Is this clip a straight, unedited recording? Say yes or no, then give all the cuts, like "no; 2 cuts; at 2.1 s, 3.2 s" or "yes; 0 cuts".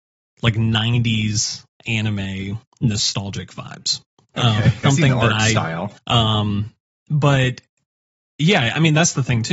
no; 2 cuts; at 4.8 s, 6.0 s